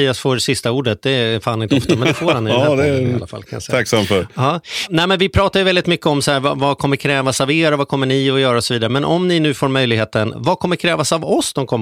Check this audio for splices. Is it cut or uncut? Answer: uncut